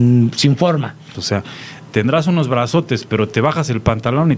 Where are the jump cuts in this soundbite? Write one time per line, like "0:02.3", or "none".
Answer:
0:01.1